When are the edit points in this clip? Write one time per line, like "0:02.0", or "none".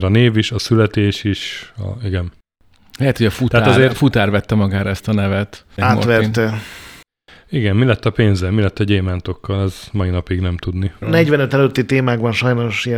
0:05.8
0:11.0

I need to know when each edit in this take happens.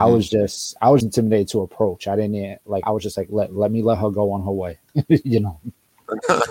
0:01.0
0:02.8

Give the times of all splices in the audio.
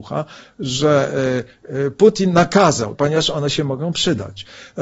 0:02.9

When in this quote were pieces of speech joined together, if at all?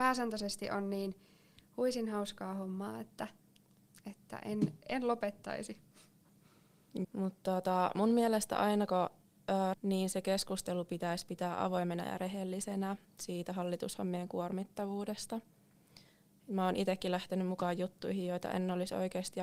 0:07.0
0:09.7

